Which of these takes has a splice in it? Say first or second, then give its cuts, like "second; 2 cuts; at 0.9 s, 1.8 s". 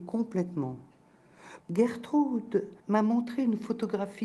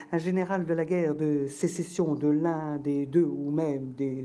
first; 2 cuts; at 1.6 s, 2.8 s